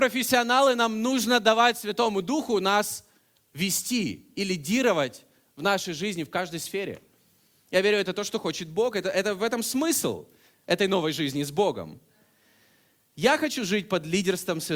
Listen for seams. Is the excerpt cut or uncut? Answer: uncut